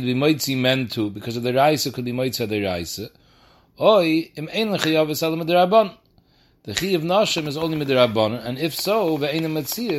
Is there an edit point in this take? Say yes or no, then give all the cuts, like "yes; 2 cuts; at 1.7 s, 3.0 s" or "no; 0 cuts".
no; 0 cuts